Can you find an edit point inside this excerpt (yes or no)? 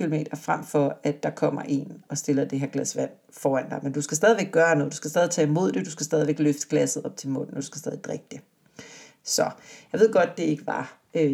yes